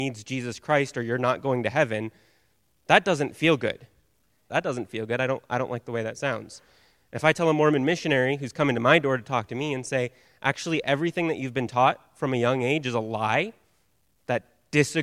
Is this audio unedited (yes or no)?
no